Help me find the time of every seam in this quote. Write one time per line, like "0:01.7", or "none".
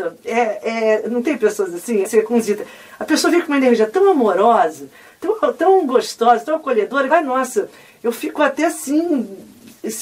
0:02.0
0:07.1